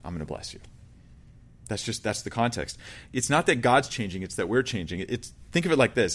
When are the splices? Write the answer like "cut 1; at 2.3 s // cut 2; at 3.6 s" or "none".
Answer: none